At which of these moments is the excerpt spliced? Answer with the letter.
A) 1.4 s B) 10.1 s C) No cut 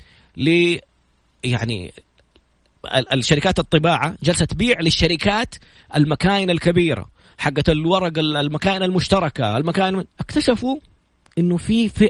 B